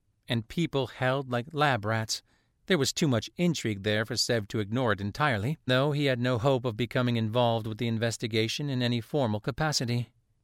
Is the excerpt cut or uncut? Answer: cut